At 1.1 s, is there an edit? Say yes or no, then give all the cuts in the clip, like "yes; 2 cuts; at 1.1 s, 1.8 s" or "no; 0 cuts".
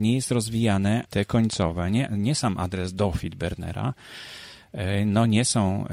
yes; 1 cut; at 1.1 s